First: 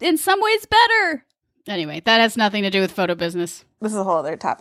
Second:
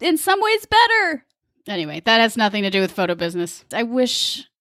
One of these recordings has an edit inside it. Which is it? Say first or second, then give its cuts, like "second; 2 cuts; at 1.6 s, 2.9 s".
second; 1 cut; at 3.7 s